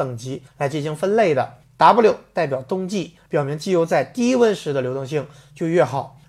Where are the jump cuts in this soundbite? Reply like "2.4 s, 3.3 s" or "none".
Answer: 3.3 s